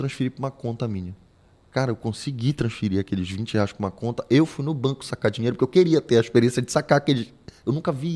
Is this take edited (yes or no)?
no